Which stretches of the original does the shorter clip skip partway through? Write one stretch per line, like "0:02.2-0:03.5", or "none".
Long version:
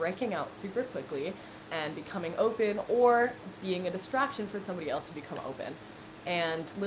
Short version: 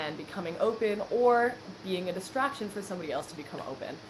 none